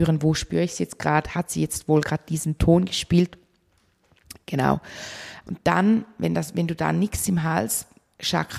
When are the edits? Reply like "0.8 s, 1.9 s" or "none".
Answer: 5.4 s